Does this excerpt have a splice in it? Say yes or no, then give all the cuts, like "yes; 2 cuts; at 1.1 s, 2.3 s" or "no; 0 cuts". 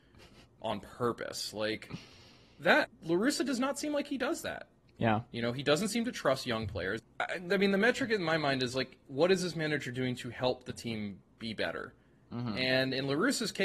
yes; 2 cuts; at 2.8 s, 7.0 s